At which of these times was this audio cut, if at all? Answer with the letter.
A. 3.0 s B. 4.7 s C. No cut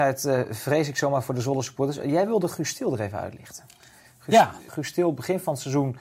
B